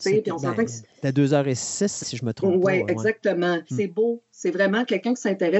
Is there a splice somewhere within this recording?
yes; 2 cuts; at 2.0 s, 3.7 s

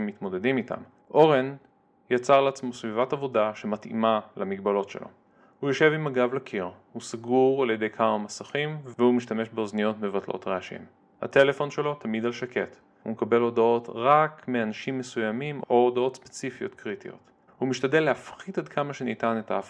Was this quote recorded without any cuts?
no; 2 cuts; at 1.0 s, 17.5 s

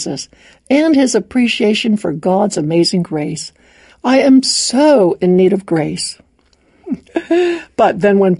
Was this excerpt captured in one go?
no; 2 cuts; at 3.9 s, 6.8 s

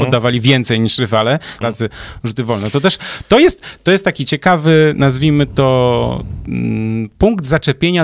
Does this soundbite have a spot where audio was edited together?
yes; 1 cut; at 1.6 s

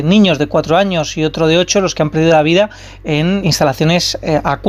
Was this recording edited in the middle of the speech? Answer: yes; 1 cut; at 3.4 s

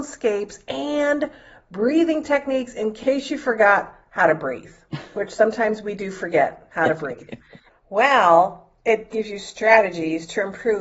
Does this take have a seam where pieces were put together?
yes; 2 cuts; at 7.7 s, 9.1 s

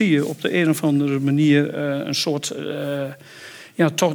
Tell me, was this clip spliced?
no; 0 cuts

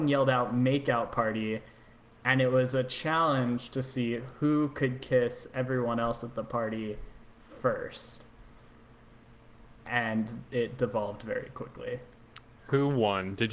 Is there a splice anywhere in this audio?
no; 0 cuts

